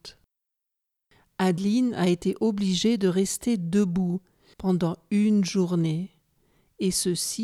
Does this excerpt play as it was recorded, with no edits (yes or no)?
no